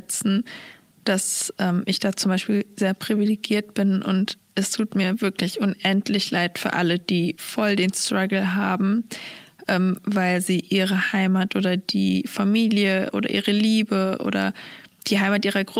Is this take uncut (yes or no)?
yes